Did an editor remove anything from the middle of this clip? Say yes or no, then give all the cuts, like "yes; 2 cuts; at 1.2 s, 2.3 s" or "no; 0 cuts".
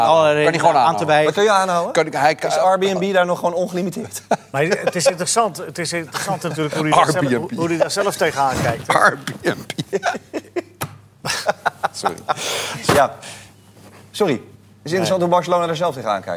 no; 0 cuts